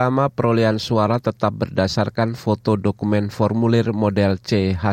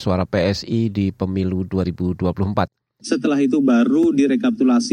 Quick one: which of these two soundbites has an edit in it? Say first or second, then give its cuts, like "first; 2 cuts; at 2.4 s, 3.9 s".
second; 1 cut; at 3.0 s